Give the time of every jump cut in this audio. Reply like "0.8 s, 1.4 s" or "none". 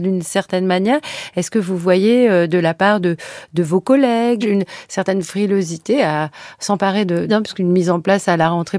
4.4 s, 7.3 s